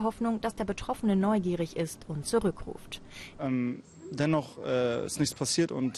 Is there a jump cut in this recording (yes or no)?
yes